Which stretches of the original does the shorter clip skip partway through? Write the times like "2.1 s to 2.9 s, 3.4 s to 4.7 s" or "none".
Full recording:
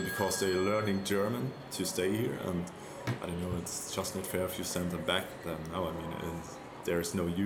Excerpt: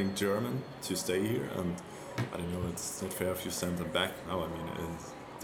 3.9 s to 4.1 s, 5.4 s to 5.7 s